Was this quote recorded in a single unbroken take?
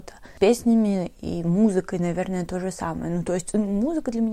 yes; 0 cuts

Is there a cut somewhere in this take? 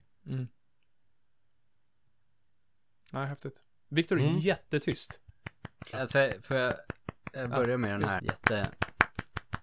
yes; 2 cuts; at 5.9 s, 8.2 s

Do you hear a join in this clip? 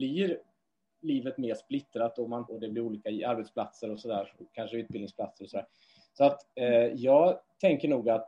yes; 1 cut; at 2.5 s

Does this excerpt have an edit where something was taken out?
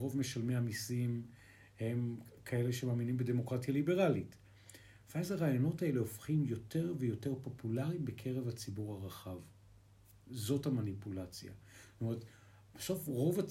no; 0 cuts

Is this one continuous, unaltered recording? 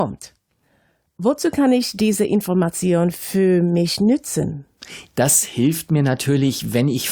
no; 1 cut; at 5.1 s

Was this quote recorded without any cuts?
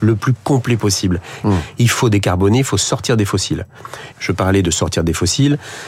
no; 2 cuts; at 1.4 s, 4.1 s

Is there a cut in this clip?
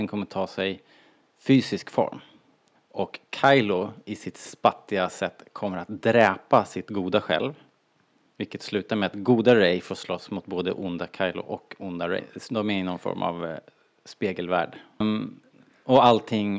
yes; 3 cuts; at 2.8 s, 12.2 s, 15.0 s

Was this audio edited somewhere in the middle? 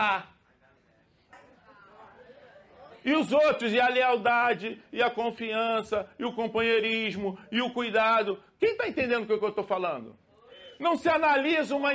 no; 0 cuts

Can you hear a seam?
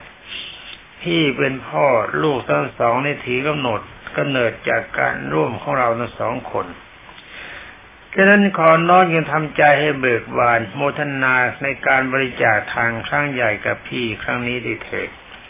no; 0 cuts

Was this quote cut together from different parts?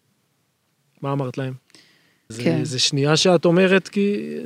yes; 1 cut; at 2.3 s

